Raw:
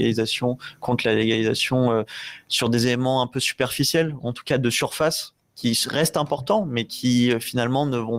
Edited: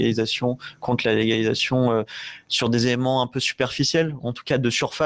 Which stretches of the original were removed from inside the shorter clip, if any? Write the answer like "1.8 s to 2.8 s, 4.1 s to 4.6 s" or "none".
none

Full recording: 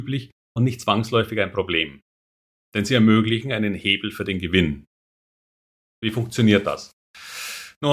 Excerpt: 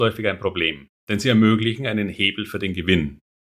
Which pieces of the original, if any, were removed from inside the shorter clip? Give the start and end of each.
2.1 s to 2.6 s

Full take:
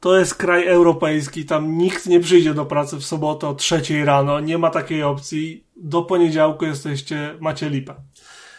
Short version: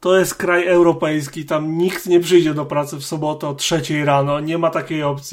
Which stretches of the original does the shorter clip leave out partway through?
none

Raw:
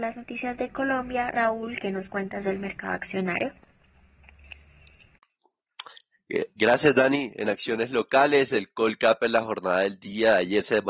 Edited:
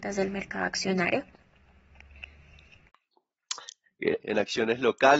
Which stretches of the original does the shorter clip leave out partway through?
6.5 s to 7.3 s

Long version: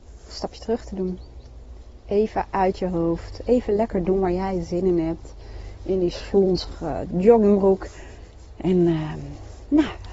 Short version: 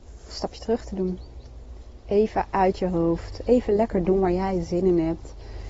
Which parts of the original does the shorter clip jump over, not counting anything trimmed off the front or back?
none

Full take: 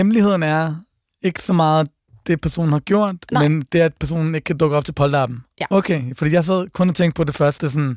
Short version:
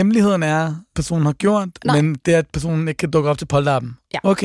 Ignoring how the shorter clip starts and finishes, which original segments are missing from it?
0.9 s to 2.4 s

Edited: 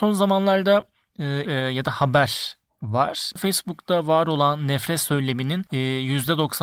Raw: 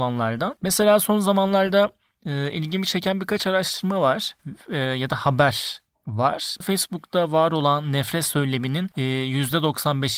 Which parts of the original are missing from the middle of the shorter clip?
2.5 s to 4.7 s

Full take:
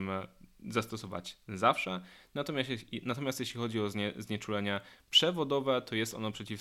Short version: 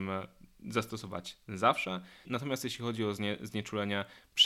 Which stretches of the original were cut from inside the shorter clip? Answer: 2.2 s to 3.0 s

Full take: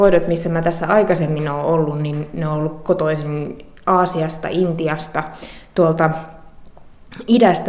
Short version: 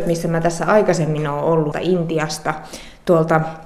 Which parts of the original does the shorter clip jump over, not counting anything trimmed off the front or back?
1.9 s to 4.4 s

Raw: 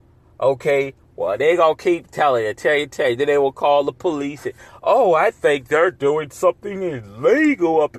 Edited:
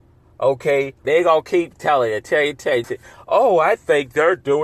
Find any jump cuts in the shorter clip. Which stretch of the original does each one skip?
1.0 s to 1.4 s, 3.2 s to 4.4 s

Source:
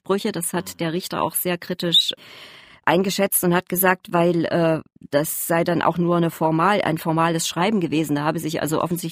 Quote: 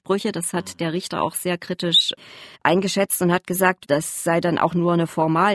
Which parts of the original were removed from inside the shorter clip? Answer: 2.5 s to 2.8 s, 4.1 s to 5.1 s

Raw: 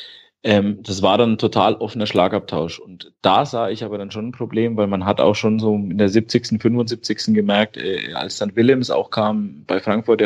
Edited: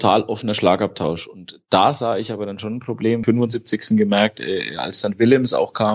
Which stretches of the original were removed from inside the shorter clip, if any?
4.8 s to 6.6 s

